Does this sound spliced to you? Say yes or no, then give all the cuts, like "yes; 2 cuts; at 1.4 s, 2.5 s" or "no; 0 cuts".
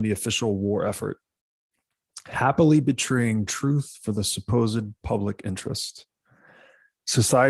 no; 0 cuts